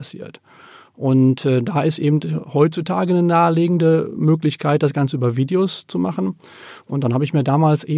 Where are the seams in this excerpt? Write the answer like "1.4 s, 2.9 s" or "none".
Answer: none